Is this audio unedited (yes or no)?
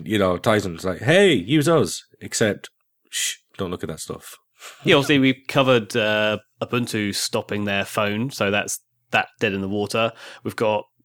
yes